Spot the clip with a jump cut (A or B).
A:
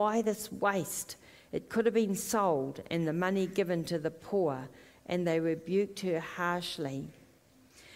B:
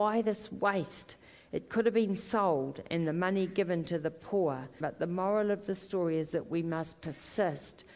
B